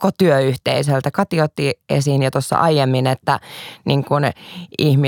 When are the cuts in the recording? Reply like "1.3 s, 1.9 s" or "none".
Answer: none